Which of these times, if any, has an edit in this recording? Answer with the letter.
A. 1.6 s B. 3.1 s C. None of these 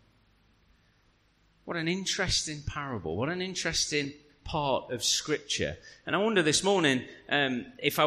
C